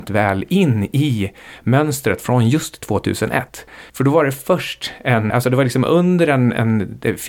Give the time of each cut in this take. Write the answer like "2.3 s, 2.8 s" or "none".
5.3 s